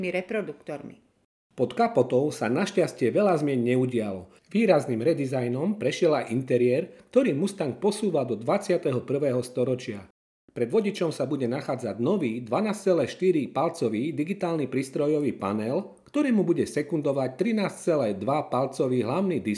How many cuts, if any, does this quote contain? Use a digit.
1